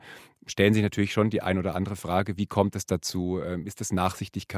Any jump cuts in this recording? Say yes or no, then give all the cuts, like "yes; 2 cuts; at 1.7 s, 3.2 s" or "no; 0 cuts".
no; 0 cuts